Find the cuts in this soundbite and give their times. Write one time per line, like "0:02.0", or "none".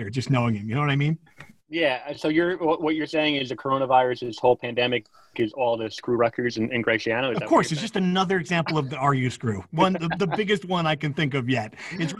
none